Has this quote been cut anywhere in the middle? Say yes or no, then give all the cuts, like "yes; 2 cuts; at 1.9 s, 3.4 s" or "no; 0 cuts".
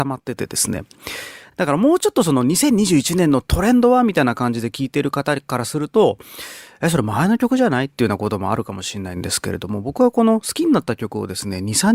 no; 0 cuts